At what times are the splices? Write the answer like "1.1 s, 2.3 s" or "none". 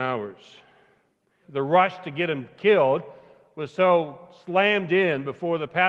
1.4 s